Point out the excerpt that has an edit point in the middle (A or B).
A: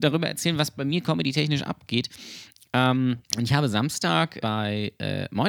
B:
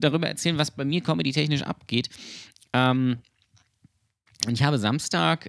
A